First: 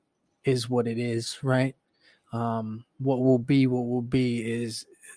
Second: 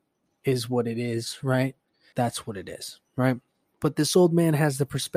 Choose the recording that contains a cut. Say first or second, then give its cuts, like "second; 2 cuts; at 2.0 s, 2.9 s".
second; 1 cut; at 2.1 s